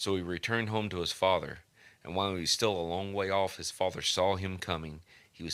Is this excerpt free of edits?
yes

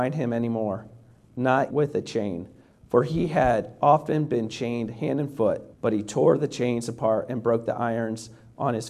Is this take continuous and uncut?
no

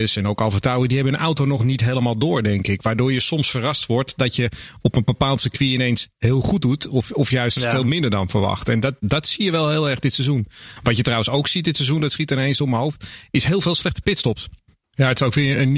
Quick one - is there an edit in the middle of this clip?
yes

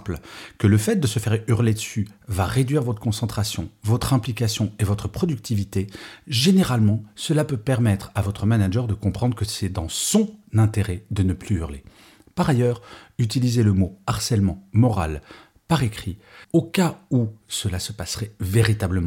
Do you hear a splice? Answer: no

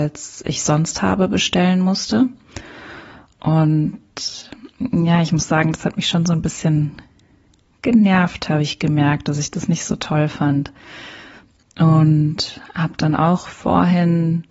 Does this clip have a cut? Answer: no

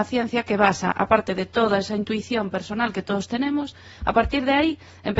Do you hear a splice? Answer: no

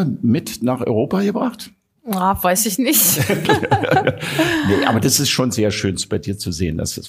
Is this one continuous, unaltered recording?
yes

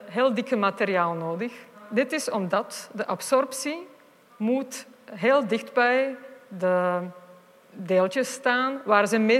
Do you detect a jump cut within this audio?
yes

